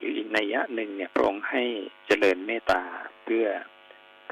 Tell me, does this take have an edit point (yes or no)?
yes